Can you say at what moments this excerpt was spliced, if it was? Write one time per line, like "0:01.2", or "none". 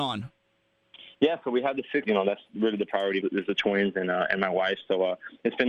0:02.0
0:03.2